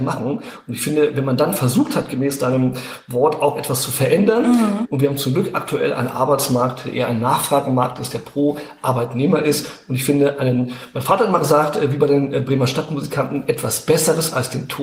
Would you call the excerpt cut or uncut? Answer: cut